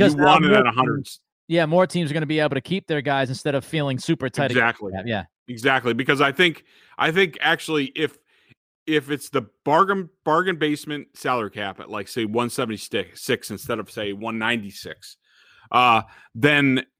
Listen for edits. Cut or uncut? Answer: uncut